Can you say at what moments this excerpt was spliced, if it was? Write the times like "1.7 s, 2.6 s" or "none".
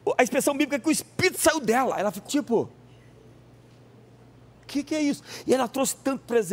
2.3 s